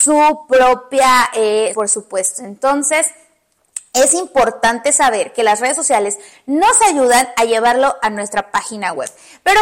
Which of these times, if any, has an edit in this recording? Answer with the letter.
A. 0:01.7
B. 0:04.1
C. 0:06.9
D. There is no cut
A